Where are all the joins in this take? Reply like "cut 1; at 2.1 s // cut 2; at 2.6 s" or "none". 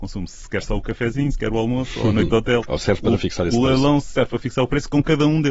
cut 1; at 2.6 s